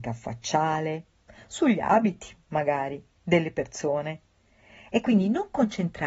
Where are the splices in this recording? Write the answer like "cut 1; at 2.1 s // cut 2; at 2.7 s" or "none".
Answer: none